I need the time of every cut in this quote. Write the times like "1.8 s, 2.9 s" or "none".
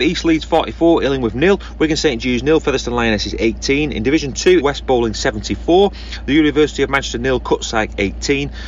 4.6 s